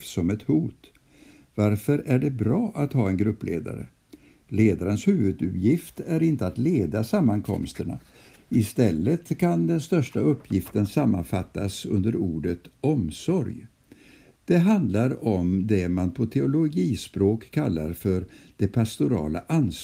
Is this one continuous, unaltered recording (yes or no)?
yes